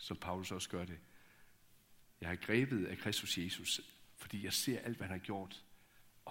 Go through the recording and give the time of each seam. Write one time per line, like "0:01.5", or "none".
0:02.0